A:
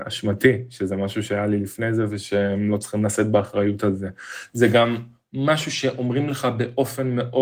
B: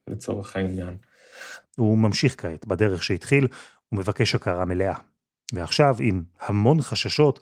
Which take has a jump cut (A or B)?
B